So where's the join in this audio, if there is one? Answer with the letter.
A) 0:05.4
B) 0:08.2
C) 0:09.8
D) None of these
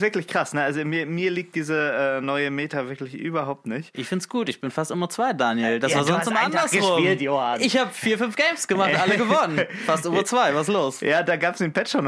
D